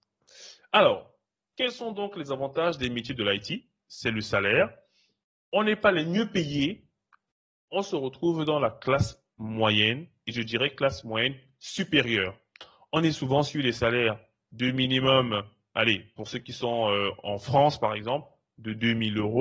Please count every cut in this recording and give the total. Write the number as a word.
zero